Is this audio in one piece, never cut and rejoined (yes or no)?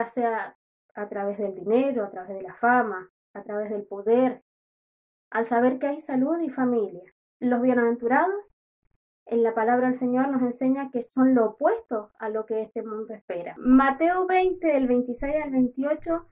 yes